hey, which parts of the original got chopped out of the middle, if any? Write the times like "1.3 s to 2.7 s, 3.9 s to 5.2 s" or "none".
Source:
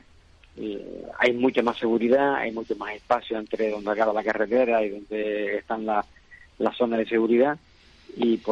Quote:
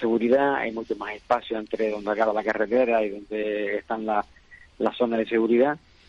none